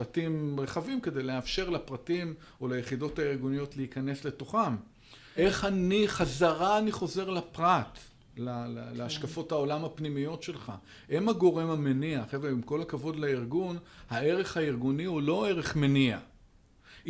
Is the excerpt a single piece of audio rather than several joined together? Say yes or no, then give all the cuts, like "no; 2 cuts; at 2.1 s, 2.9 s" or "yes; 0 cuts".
no; 1 cut; at 5.4 s